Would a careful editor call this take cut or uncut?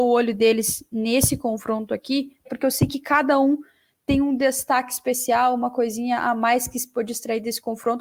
cut